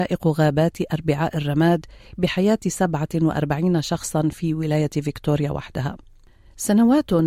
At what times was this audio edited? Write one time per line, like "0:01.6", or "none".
none